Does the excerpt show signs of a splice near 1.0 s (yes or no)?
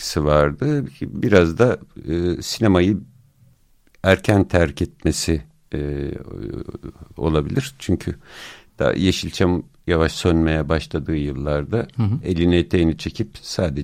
no